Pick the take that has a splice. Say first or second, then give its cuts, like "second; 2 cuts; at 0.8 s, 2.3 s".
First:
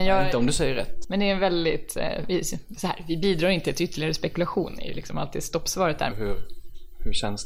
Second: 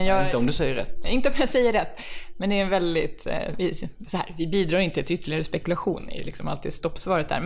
first; 2 cuts; at 1.0 s, 6.1 s